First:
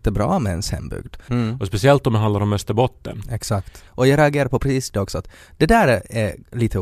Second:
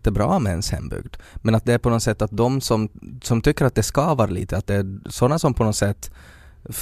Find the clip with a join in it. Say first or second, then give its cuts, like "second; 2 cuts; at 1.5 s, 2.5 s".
first; 2 cuts; at 1.3 s, 3.9 s